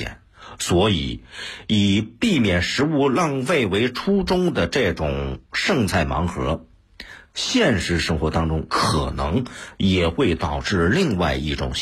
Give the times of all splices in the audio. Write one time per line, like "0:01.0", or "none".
none